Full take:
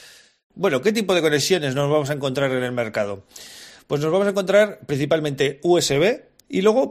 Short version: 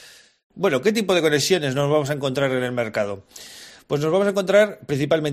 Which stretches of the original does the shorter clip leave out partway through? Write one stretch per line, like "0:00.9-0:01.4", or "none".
none